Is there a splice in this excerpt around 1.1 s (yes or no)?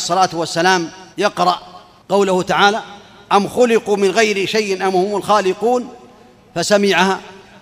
yes